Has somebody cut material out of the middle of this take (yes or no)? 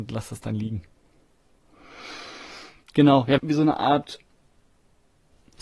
yes